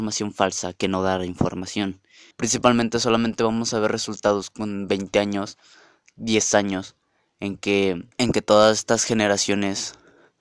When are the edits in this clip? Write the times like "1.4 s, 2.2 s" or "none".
2.3 s, 8.1 s